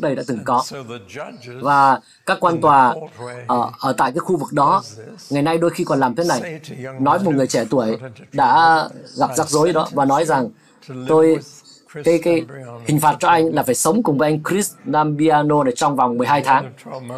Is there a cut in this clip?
no; 0 cuts

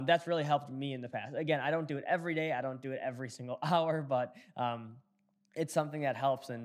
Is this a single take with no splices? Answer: yes; 0 cuts

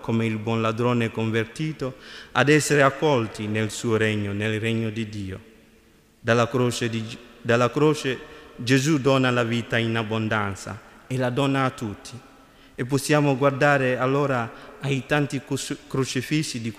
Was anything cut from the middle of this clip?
no; 0 cuts

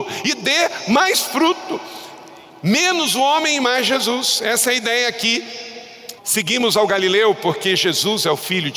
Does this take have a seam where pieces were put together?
yes; 1 cut; at 6.2 s

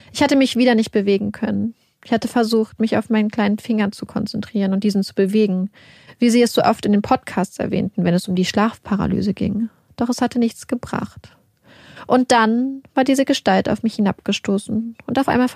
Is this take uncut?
yes; 0 cuts

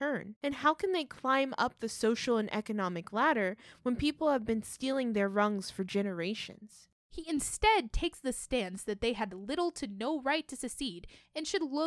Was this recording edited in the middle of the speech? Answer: yes; 1 cut; at 7.1 s

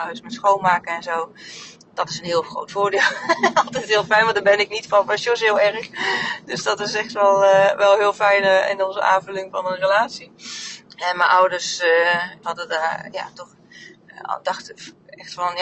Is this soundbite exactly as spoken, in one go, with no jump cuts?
no; 2 cuts; at 10.8 s, 12.4 s

